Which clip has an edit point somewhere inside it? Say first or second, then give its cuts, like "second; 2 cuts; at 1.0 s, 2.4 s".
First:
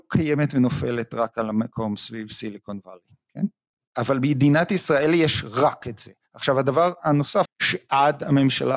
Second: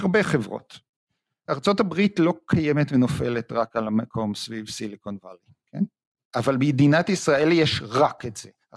first; 1 cut; at 7.5 s